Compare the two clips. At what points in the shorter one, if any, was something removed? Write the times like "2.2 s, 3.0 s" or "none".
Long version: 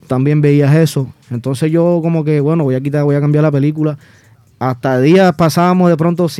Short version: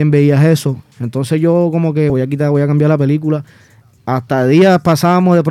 2.1 s